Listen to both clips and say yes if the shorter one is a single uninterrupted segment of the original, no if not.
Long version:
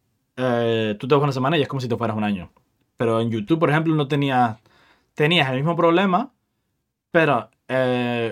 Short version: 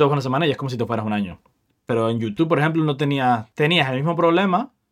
no